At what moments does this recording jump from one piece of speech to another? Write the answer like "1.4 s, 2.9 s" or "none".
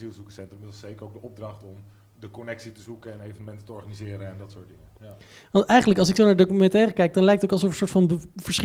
none